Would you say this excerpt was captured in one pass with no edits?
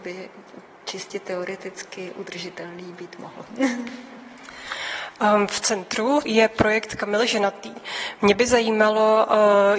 yes; 0 cuts

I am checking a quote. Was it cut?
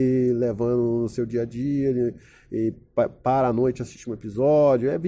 no; 0 cuts

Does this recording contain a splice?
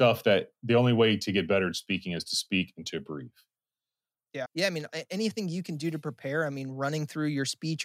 yes; 1 cut; at 4.5 s

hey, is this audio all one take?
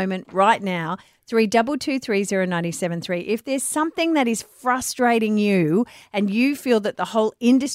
yes; 0 cuts

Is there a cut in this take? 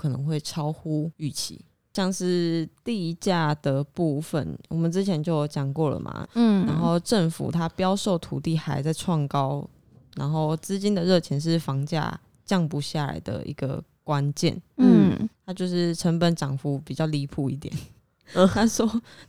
yes; 2 cuts; at 6.2 s, 15.3 s

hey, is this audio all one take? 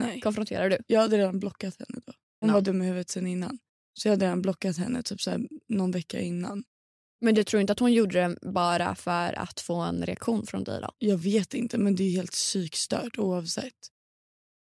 no; 1 cut; at 2.4 s

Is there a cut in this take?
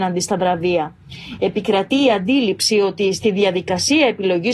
no; 0 cuts

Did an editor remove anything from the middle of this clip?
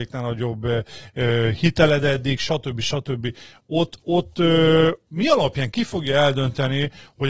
no; 0 cuts

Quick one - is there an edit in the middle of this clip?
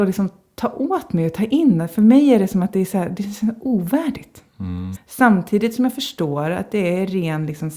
yes; 1 cut; at 4.9 s

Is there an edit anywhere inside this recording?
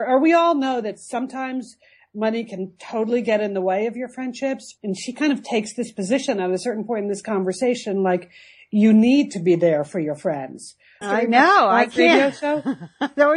yes; 2 cuts; at 4.8 s, 11.0 s

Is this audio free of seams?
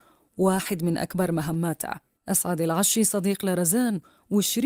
no; 1 cut; at 2.2 s

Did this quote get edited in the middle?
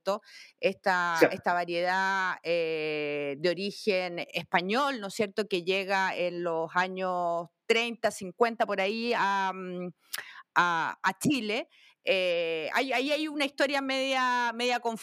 no; 0 cuts

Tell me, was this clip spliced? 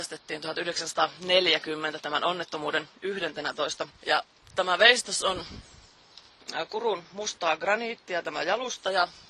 yes; 1 cut; at 3.9 s

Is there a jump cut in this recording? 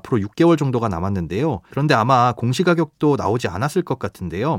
yes; 1 cut; at 1.7 s

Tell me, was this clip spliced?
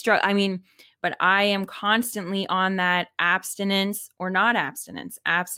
yes; 1 cut; at 1.0 s

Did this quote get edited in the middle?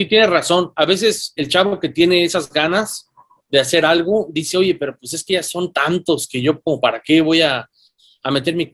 yes; 1 cut; at 1.4 s

